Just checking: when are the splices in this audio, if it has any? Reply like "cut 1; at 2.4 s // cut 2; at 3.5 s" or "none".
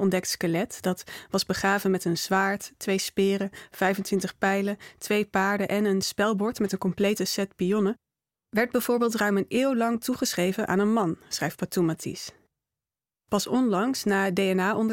none